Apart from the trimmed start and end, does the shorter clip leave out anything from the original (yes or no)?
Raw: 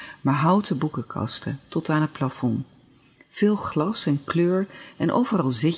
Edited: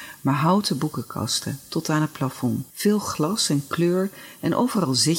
yes